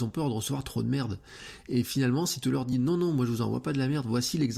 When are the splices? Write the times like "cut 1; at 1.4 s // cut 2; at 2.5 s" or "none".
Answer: none